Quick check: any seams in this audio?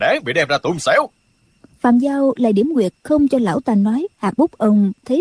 yes; 1 cut; at 4.1 s

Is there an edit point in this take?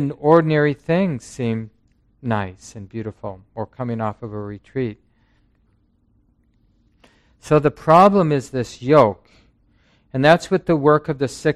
no; 0 cuts

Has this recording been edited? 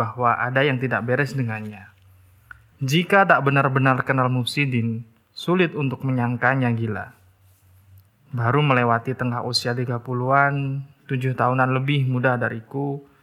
yes; 1 cut; at 2.7 s

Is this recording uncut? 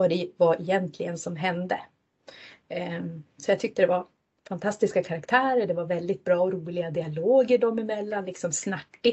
yes; 0 cuts

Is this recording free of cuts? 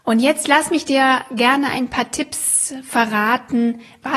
yes; 0 cuts

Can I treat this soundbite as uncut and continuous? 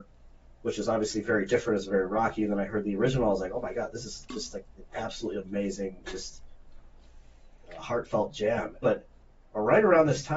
no; 2 cuts; at 6.0 s, 8.8 s

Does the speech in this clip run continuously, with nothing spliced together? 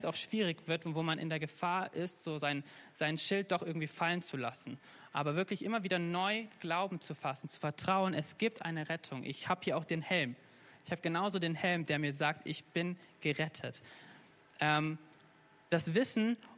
yes; 0 cuts

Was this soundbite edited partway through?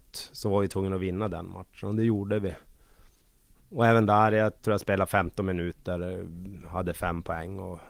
no; 0 cuts

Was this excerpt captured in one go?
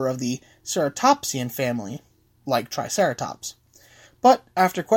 yes; 0 cuts

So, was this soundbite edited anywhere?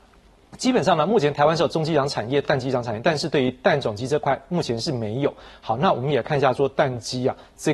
no; 0 cuts

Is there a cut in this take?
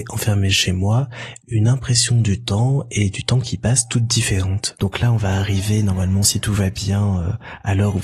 no; 0 cuts

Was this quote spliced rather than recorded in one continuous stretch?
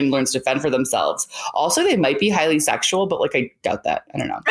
no; 0 cuts

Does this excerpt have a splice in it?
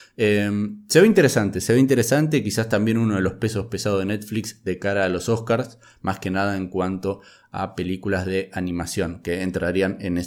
no; 0 cuts

